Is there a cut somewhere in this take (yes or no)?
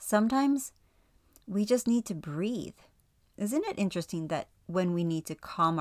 no